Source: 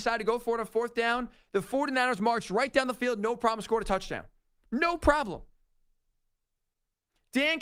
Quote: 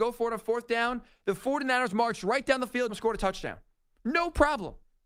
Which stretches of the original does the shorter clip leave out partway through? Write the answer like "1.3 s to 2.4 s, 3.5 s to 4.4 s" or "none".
3.2 s to 3.6 s